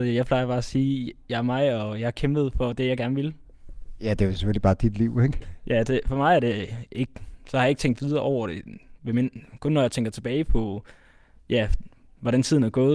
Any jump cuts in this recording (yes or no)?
no